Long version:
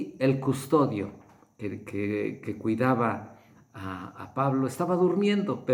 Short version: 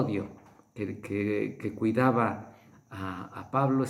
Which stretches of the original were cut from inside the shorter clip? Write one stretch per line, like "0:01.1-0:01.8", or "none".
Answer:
none